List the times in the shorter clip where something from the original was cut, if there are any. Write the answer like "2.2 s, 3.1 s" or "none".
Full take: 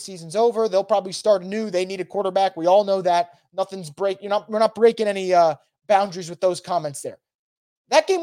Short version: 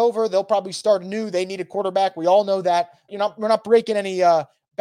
3.1 s